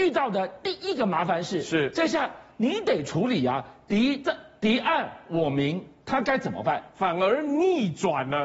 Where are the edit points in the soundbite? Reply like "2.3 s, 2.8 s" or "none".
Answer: none

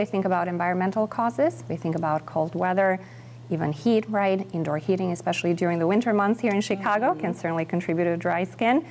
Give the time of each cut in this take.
none

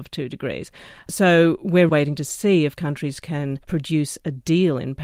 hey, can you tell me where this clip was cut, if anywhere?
1.9 s, 3.6 s

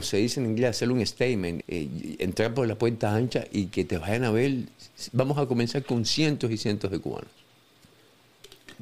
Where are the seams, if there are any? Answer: 1.6 s

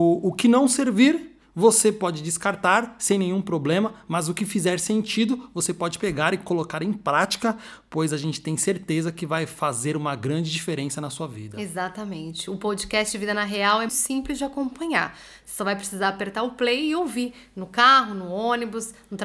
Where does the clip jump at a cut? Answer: 13.9 s

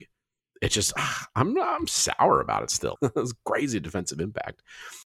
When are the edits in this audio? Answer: 3.0 s

